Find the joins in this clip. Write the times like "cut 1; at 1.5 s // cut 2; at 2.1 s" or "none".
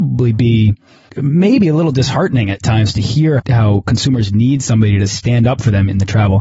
cut 1; at 1.1 s // cut 2; at 3.4 s